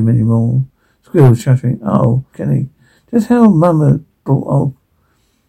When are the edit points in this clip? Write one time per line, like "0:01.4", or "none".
0:02.3